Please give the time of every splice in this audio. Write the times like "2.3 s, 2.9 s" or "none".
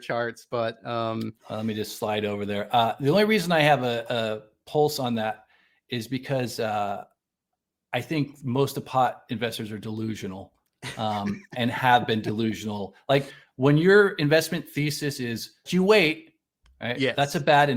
15.7 s